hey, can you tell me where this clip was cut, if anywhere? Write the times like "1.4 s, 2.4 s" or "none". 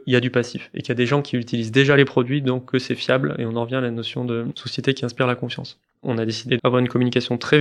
6.6 s